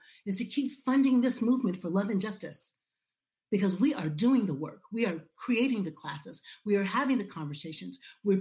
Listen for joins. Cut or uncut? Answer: uncut